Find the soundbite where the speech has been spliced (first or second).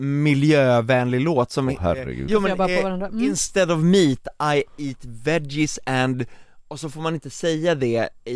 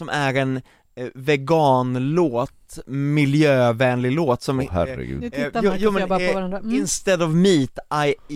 first